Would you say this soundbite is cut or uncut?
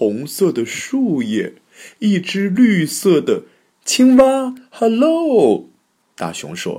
uncut